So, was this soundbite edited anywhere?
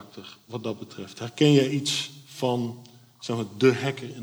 no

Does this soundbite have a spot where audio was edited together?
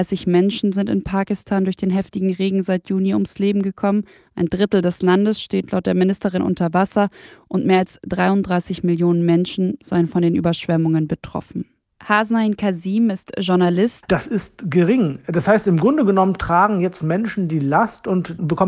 yes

